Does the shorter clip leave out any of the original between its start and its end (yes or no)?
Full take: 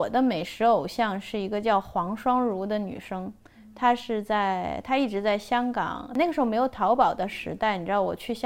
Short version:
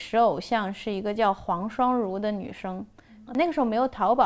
yes